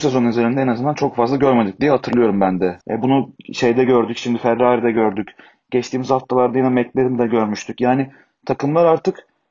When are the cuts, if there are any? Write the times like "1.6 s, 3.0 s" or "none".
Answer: 2.8 s